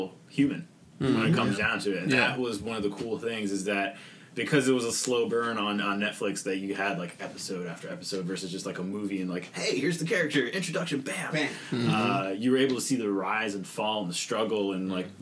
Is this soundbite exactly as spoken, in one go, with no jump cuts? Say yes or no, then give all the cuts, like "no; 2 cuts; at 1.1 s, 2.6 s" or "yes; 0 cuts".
yes; 0 cuts